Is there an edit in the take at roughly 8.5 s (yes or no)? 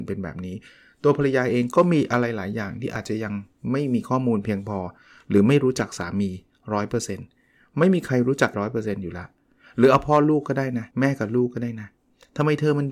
yes